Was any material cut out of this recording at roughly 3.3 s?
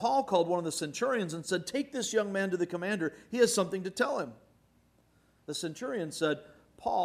no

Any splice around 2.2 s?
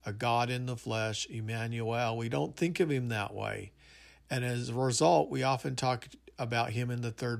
no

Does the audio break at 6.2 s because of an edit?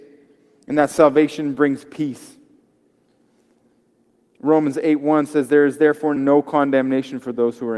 yes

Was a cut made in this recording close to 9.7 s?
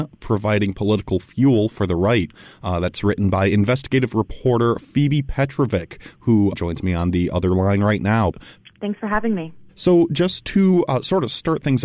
yes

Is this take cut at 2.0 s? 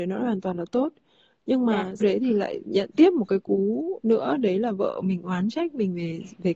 yes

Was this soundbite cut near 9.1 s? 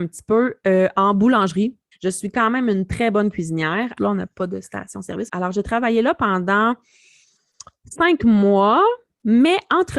no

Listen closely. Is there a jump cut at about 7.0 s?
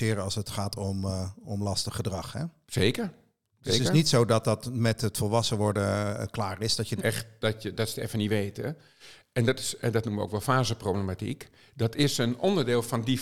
yes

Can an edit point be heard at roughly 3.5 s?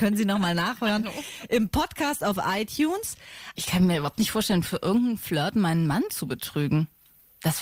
yes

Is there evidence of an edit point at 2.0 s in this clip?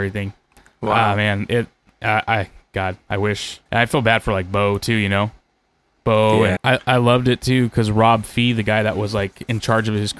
no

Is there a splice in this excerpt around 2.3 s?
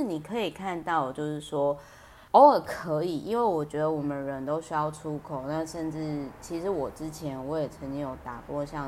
yes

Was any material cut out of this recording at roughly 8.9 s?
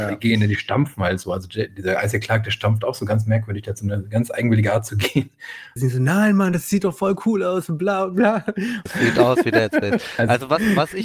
yes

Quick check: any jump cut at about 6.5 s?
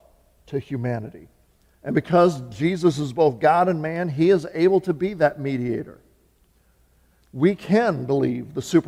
no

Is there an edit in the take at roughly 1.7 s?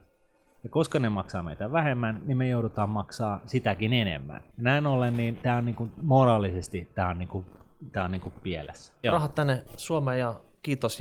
no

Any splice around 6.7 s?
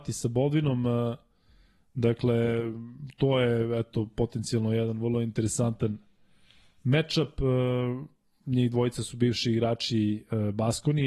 no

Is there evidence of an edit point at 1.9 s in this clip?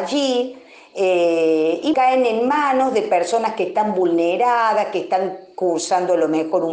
yes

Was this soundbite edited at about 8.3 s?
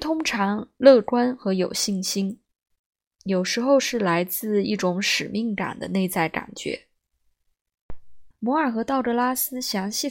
yes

